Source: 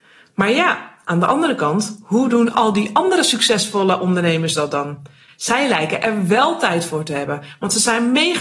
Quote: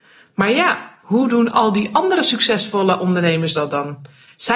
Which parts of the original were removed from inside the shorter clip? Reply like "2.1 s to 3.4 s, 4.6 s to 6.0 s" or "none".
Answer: 1.0 s to 2.0 s